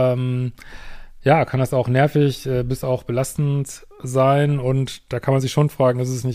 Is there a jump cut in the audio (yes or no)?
no